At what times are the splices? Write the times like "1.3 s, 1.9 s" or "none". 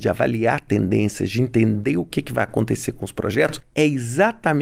none